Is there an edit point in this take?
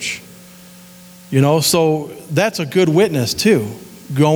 no; 0 cuts

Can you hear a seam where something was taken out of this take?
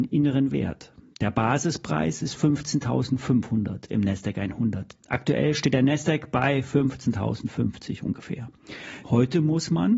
yes; 2 cuts; at 5.0 s, 9.0 s

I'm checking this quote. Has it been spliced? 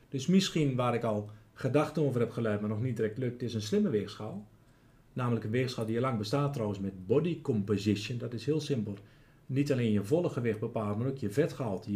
no; 0 cuts

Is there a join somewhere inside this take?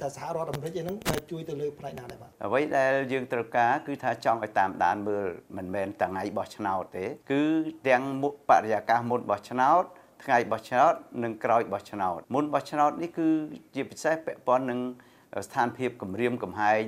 yes; 2 cuts; at 7.2 s, 12.2 s

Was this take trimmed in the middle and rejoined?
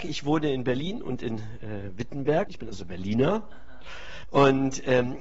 yes; 2 cuts; at 2.5 s, 4.2 s

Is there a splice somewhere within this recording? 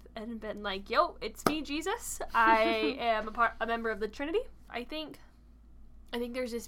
yes; 1 cut; at 4.7 s

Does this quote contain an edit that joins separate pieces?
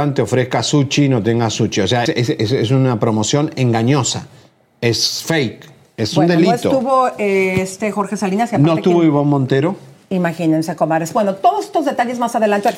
yes; 1 cut; at 2.1 s

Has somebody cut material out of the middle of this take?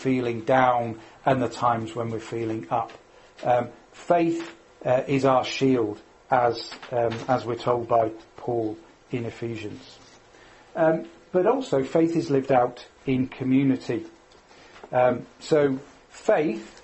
no; 0 cuts

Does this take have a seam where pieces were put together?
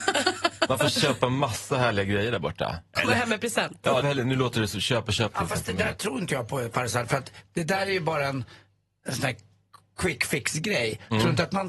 yes; 2 cuts; at 4.0 s, 5.3 s

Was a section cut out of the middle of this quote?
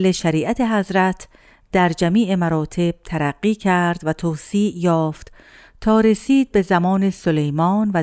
no; 0 cuts

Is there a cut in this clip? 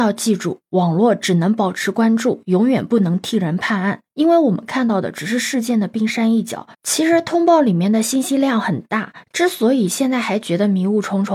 yes; 1 cut; at 6.7 s

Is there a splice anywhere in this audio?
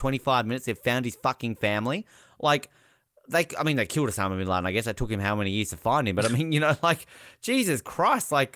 no; 0 cuts

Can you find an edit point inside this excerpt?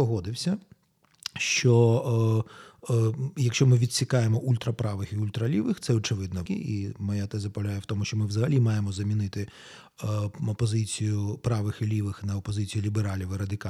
yes; 1 cut; at 6.5 s

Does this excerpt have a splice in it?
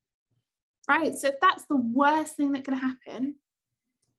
no; 0 cuts

